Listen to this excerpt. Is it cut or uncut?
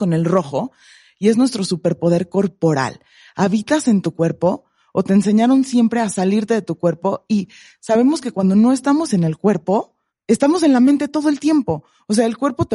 cut